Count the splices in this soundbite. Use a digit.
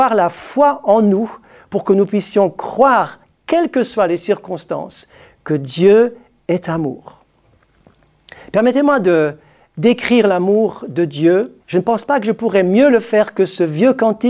1